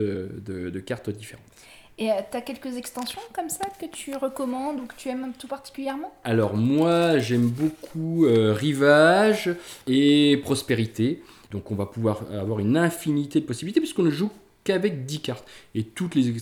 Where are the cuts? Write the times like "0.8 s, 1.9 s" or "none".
11.5 s